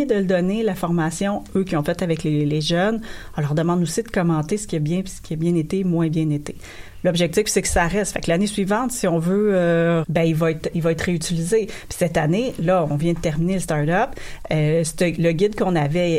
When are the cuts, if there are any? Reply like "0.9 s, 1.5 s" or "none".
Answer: 10.0 s